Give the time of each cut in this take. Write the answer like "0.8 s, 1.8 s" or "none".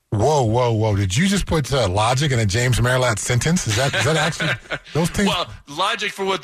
none